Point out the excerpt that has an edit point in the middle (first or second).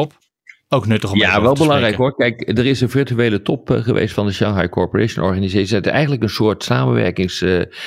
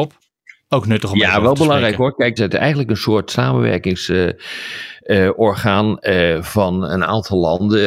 second